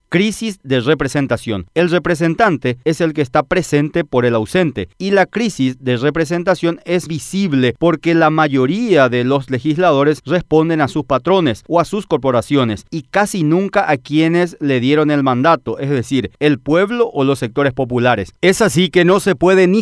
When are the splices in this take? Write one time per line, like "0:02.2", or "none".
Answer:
0:07.1